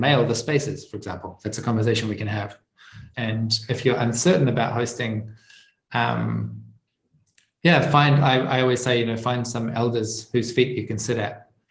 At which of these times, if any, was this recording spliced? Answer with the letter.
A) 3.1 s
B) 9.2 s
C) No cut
A